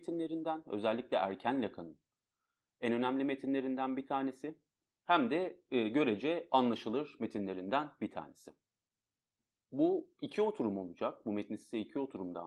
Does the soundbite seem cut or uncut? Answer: uncut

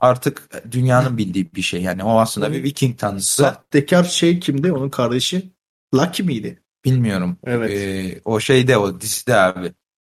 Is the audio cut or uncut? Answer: uncut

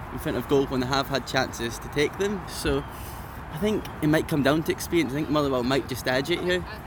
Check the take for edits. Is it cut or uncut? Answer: cut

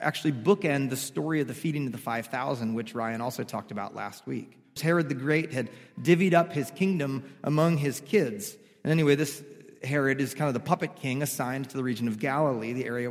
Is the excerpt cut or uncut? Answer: cut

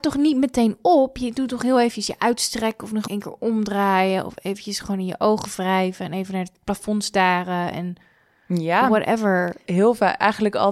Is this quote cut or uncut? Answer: cut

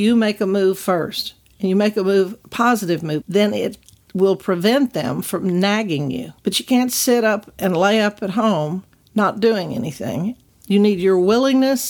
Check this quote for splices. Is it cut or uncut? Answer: cut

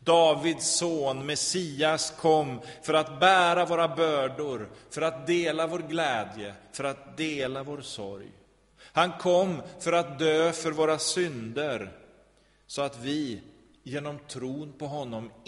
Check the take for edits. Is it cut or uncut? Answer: uncut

